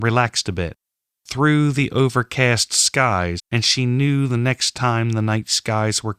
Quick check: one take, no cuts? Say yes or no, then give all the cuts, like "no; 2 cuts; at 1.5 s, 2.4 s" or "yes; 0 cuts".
no; 1 cut; at 3.4 s